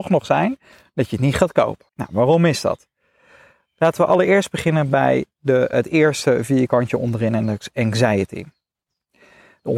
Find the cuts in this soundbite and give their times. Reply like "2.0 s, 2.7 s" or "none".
1.9 s, 5.7 s

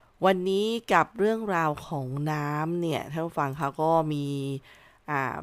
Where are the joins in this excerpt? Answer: none

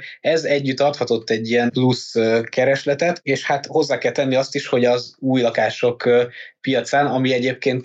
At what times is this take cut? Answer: none

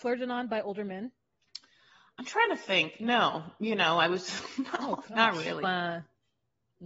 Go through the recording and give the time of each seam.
5.6 s

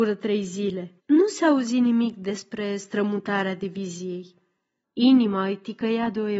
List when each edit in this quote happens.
1.0 s, 4.8 s

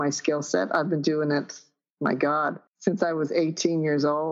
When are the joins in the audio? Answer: 2.7 s

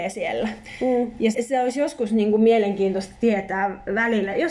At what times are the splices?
1.3 s

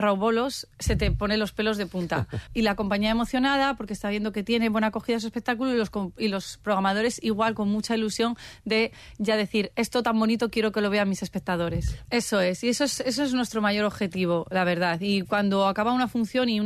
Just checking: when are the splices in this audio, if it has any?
2.5 s, 12.0 s

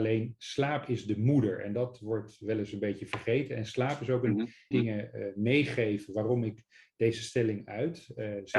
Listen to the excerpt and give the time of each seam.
4.7 s

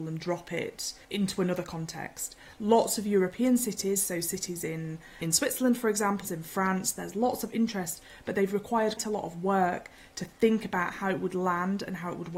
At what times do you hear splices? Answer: 6.2 s, 9.0 s

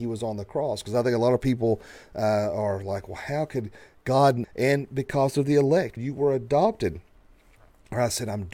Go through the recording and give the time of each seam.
4.4 s, 6.0 s

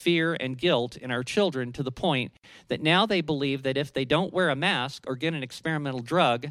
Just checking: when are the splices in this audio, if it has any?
none

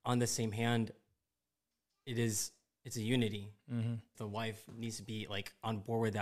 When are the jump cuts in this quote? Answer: 4.1 s

